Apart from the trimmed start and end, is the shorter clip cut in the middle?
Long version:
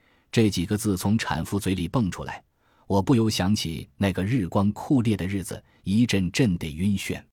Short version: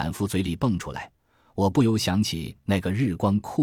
no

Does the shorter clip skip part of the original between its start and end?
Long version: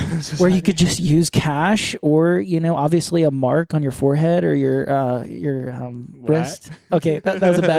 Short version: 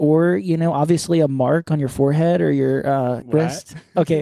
yes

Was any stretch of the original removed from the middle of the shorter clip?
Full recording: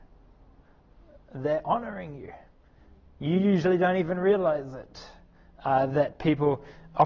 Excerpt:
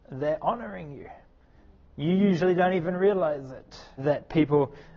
yes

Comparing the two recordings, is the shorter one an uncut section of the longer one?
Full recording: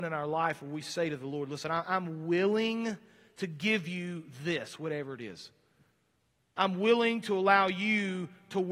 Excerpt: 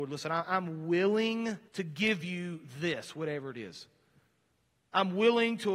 no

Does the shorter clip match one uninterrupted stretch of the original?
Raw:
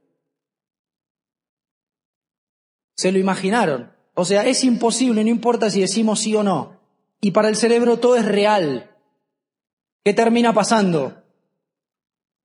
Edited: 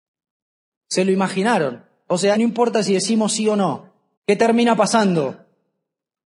no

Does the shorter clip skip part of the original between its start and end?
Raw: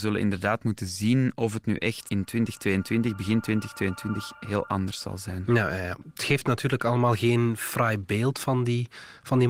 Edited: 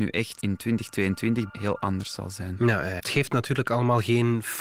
yes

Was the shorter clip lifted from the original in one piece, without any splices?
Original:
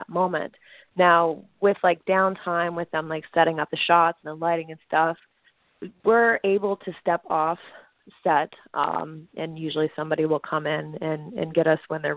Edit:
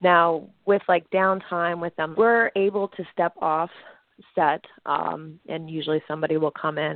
no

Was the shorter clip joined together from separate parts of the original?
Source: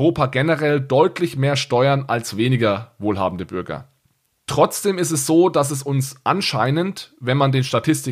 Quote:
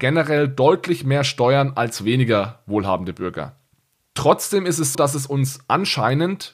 yes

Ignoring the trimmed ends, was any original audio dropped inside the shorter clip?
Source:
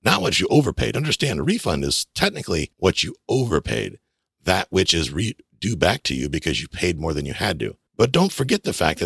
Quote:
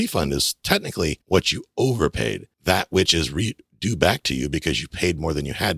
yes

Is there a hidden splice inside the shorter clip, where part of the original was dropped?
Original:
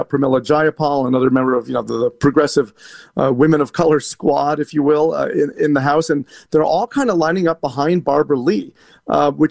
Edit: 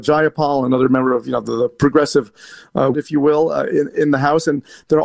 yes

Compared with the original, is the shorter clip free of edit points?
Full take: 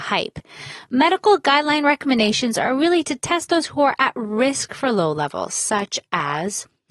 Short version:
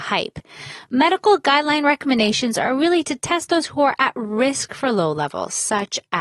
yes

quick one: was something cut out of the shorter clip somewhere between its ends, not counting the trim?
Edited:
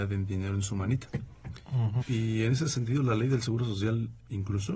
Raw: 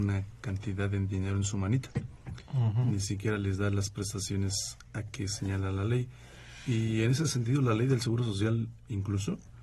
yes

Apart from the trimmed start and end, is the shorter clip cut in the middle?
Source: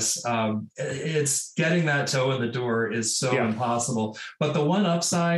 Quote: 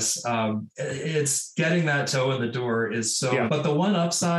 yes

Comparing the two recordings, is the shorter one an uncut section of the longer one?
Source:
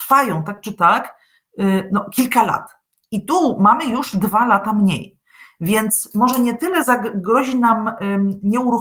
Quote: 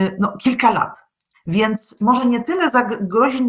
no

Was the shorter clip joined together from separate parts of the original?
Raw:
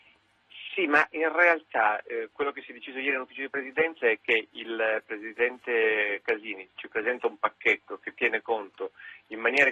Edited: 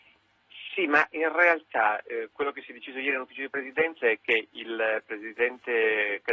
no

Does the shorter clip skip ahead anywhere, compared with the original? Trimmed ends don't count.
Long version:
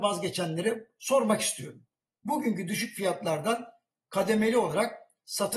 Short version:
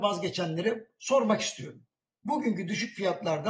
no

